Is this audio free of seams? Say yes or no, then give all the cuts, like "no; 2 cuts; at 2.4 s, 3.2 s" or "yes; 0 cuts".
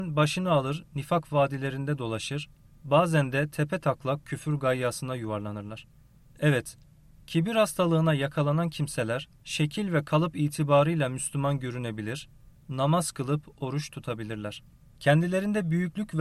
no; 2 cuts; at 12.5 s, 14.9 s